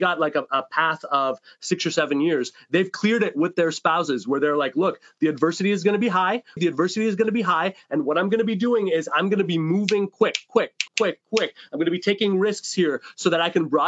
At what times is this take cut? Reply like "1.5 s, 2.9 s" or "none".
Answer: 6.6 s, 10.9 s